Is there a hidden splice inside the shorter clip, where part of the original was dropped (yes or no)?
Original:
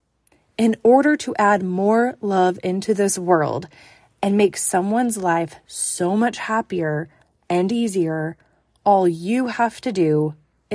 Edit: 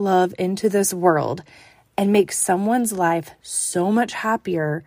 no